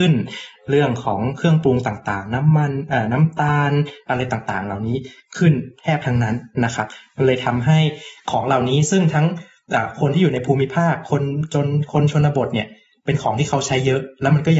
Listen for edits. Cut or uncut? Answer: uncut